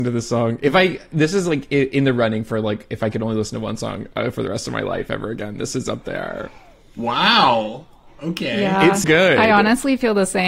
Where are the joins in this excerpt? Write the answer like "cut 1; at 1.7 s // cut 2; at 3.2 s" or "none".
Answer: cut 1; at 9.0 s